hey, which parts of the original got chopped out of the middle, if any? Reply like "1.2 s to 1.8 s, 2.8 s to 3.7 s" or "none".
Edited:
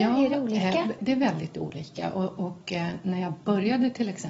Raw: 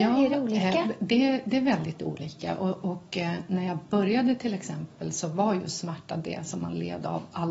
1.0 s to 1.4 s